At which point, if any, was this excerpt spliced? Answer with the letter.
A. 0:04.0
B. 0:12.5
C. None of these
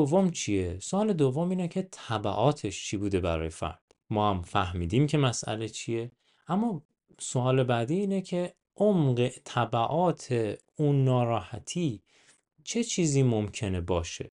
A